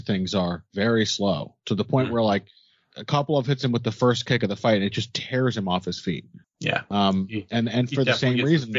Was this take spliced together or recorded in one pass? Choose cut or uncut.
cut